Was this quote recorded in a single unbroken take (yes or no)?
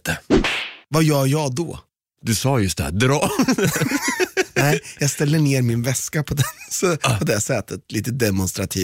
yes